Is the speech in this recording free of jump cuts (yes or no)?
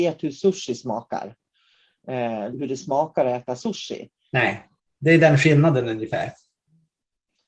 no